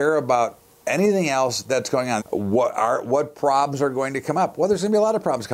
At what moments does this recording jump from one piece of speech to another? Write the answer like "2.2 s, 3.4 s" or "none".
2.2 s